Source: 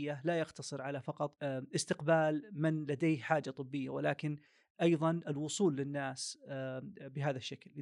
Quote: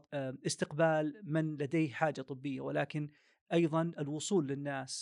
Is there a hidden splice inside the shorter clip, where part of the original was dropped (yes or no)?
no